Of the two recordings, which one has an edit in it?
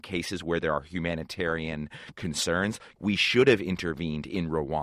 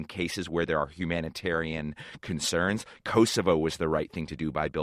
first; 1 cut; at 3.0 s

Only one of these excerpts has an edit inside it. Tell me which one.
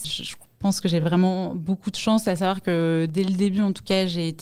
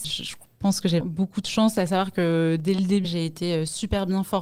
second; 2 cuts; at 1.0 s, 3.0 s

